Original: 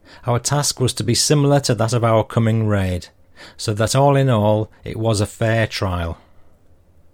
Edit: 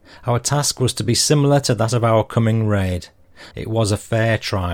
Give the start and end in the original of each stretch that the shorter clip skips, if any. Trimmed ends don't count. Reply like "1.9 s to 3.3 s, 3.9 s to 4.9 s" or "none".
3.5 s to 4.8 s